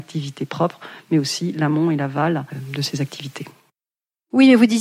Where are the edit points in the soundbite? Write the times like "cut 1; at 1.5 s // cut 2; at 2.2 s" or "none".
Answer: none